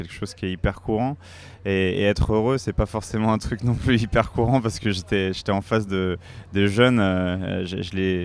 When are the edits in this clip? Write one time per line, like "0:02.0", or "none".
none